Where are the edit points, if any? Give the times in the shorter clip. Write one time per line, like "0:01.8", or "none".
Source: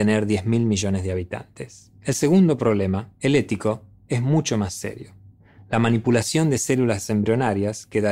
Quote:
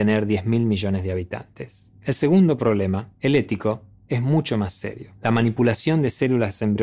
0:05.2